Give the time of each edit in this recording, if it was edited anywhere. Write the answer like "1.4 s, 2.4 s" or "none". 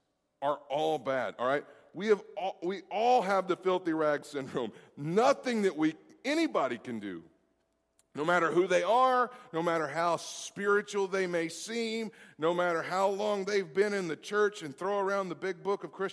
none